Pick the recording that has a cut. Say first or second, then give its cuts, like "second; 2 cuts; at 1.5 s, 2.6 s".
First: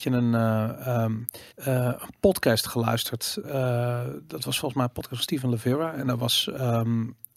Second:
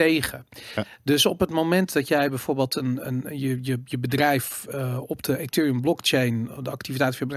first; 1 cut; at 1.5 s